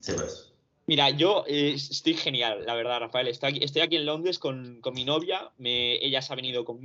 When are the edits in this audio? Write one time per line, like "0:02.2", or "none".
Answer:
none